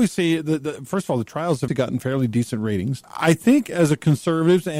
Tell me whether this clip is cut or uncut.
cut